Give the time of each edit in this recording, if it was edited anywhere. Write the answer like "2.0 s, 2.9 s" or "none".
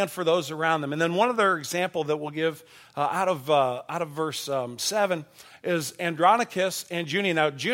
none